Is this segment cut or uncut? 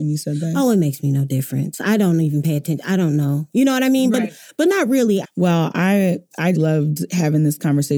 cut